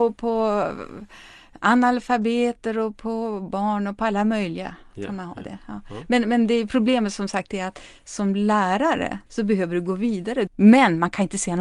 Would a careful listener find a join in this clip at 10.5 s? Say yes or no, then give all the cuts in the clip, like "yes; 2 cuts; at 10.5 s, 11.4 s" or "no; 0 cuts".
yes; 2 cuts; at 9.3 s, 10.5 s